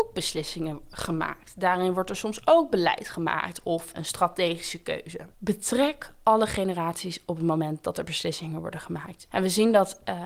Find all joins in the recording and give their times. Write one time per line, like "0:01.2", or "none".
0:03.9
0:05.3
0:09.3